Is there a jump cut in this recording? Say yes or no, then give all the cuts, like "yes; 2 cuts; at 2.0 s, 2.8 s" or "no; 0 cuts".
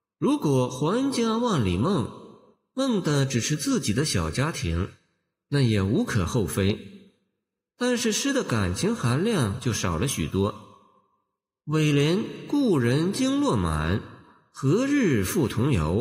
no; 0 cuts